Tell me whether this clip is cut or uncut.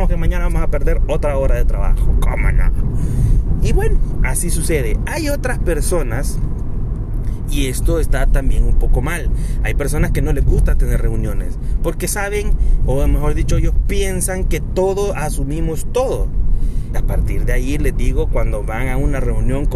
cut